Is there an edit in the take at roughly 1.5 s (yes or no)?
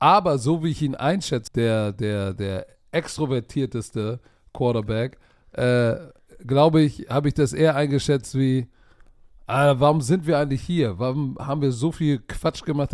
yes